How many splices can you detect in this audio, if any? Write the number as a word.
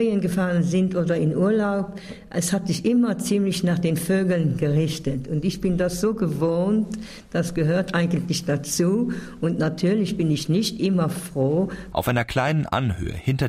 one